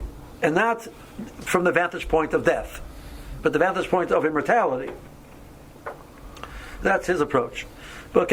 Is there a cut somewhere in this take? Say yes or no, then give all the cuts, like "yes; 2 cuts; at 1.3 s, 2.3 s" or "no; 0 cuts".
no; 0 cuts